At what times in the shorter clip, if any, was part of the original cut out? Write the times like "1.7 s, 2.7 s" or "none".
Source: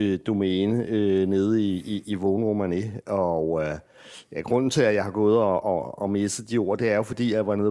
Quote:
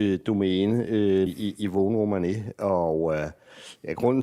1.3 s